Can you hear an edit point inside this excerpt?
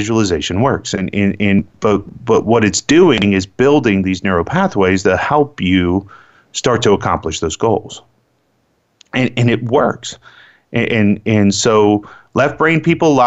no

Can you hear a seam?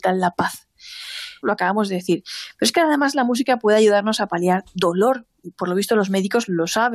yes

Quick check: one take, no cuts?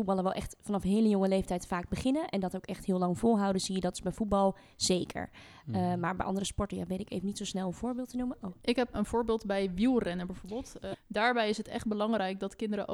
no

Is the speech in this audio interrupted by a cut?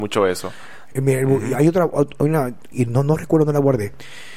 yes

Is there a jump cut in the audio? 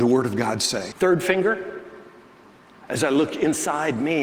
yes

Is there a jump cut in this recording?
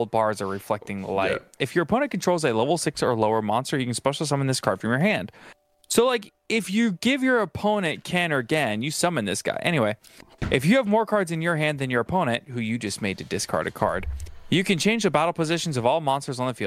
yes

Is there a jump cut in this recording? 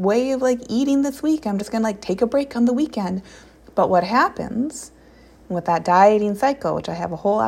no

